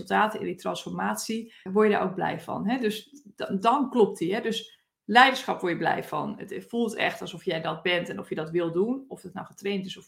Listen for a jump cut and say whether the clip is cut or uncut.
cut